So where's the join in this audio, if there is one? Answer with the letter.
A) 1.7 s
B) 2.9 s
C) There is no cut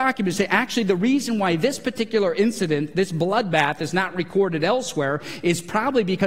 C